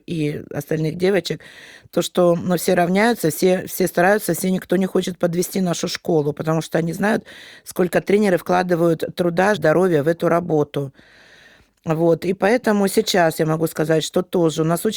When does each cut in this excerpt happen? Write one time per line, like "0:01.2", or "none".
0:09.6